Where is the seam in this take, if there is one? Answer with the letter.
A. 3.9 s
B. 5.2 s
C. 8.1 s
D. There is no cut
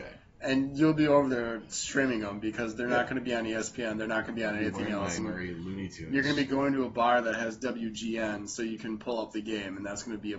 B